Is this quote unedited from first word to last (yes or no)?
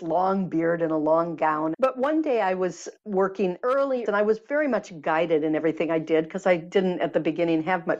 no